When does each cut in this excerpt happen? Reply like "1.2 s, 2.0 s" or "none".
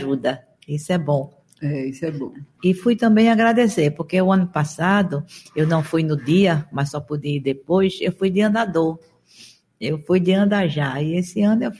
2.5 s

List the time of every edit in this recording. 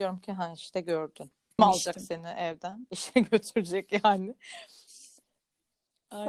1.6 s

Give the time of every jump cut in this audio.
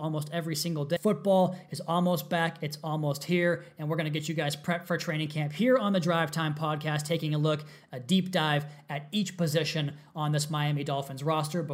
1.0 s

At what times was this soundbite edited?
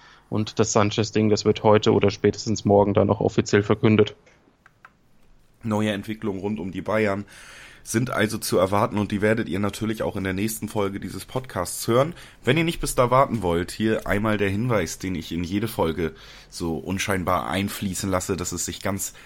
none

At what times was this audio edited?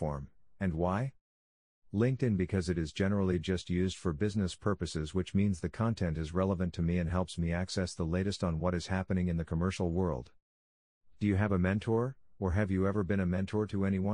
none

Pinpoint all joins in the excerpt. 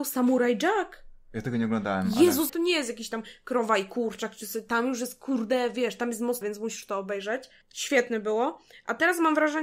2.5 s, 6.4 s

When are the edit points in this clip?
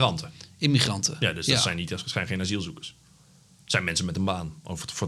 none

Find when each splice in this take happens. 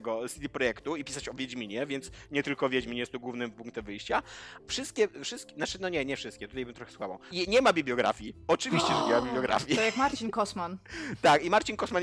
4.6 s, 7.3 s

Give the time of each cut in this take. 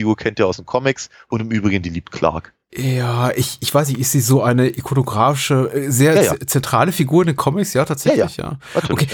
none

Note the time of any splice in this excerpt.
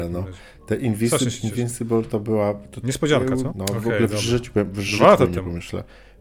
3.5 s

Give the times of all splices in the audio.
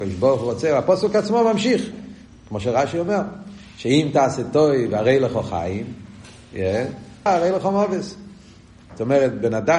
2.3 s, 7.3 s

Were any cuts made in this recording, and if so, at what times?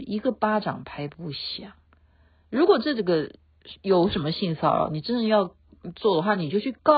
none

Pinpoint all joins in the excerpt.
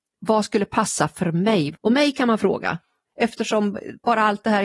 1.7 s, 3.0 s

